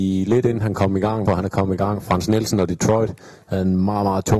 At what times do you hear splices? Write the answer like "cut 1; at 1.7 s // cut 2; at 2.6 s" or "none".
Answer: cut 1; at 1.3 s